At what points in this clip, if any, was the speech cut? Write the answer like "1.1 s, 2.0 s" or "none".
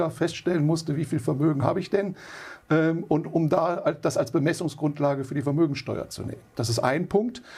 none